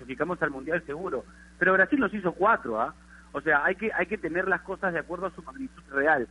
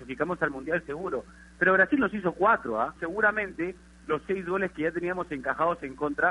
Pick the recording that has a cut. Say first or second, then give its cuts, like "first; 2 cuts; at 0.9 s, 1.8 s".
second; 1 cut; at 3.0 s